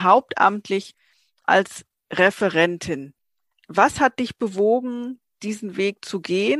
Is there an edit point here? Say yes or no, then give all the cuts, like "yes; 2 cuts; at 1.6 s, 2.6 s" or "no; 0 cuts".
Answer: no; 0 cuts